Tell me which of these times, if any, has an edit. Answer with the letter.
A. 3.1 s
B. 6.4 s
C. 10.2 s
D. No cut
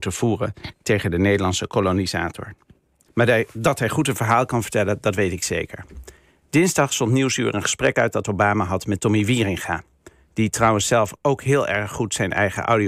A